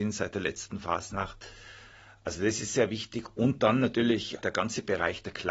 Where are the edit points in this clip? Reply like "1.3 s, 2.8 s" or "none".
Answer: none